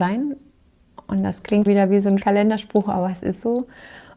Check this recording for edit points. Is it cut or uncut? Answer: cut